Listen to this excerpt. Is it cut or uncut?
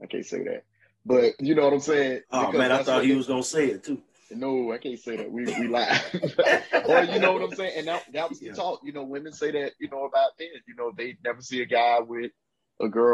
uncut